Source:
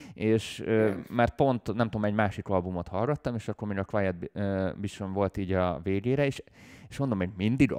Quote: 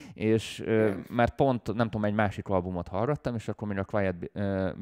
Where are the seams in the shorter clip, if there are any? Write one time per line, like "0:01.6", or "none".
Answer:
none